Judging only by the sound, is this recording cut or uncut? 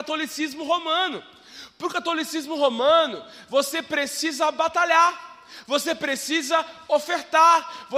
uncut